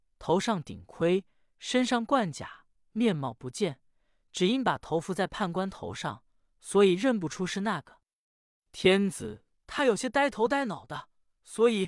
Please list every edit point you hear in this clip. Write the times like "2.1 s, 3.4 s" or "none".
9.5 s